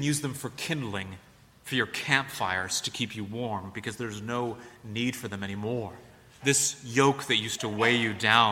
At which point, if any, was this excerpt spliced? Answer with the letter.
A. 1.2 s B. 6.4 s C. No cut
B